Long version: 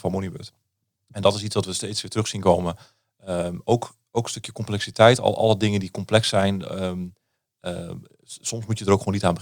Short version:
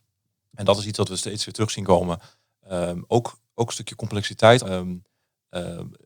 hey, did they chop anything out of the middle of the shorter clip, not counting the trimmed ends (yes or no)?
yes